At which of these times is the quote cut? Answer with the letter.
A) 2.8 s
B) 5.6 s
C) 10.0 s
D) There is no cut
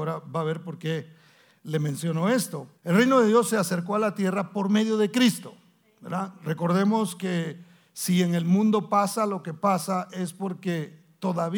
A